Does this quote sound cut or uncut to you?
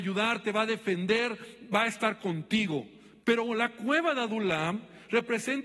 cut